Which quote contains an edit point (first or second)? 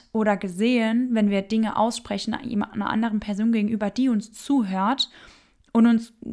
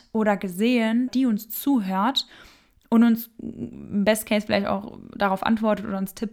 second